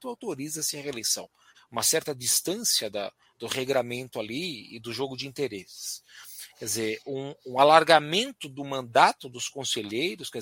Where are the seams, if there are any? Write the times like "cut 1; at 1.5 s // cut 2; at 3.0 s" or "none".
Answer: cut 1; at 1.5 s